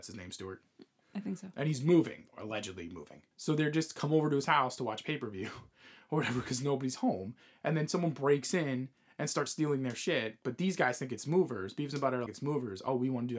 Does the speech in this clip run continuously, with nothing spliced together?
no; 2 cuts; at 3.3 s, 12.3 s

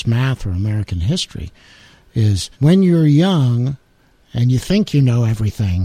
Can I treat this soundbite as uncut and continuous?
no; 1 cut; at 2.5 s

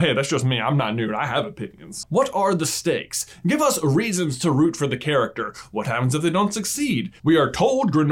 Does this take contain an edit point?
yes; 2 cuts; at 2.0 s, 7.2 s

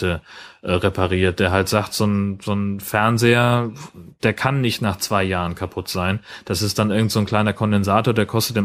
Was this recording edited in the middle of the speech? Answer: no; 0 cuts

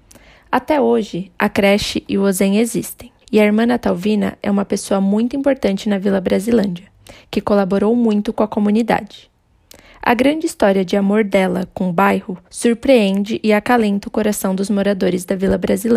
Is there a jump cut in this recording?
yes; 2 cuts; at 3.2 s, 12.5 s

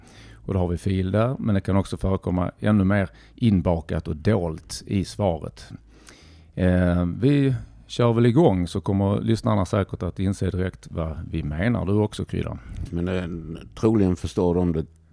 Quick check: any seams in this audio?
yes; 1 cut; at 12.9 s

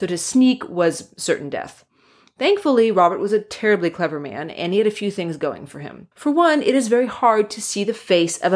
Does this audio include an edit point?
yes; 1 cut; at 6.1 s

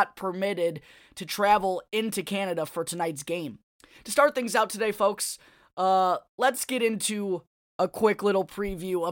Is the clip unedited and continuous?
yes; 0 cuts

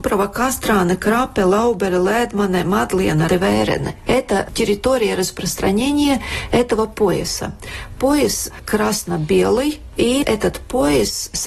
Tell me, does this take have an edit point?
yes; 1 cut; at 3.3 s

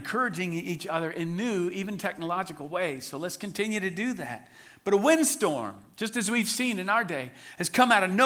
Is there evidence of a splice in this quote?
no; 0 cuts

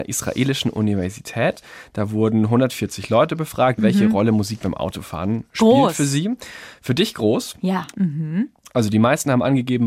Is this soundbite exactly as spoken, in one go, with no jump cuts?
no; 2 cuts; at 3.8 s, 7.9 s

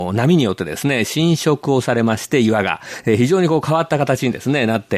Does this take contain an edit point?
no; 0 cuts

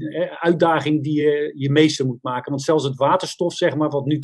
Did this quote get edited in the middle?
no; 0 cuts

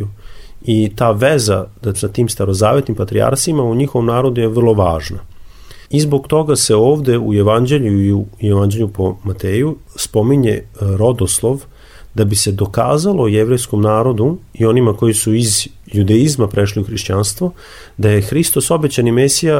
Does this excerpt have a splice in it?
yes; 2 cuts; at 1.9 s, 5.8 s

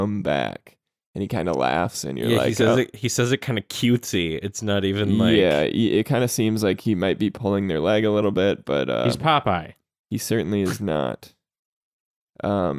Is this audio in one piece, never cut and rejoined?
yes; 0 cuts

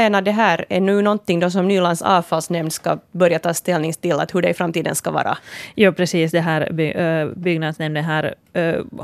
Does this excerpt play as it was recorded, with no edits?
yes; 0 cuts

